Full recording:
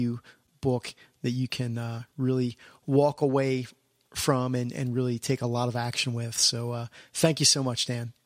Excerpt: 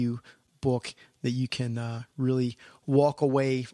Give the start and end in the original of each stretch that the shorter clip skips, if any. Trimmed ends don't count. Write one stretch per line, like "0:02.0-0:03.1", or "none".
none